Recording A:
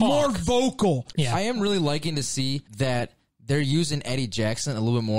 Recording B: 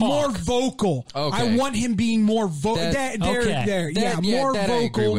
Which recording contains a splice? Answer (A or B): A